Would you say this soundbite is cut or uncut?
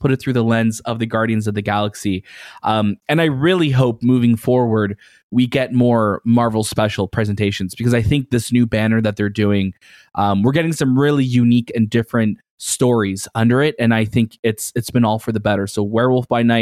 uncut